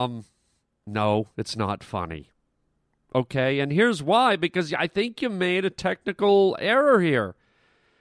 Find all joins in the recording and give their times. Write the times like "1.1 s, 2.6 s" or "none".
none